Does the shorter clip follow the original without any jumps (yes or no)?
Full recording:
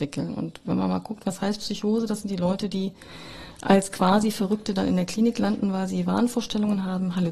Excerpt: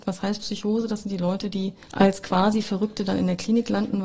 no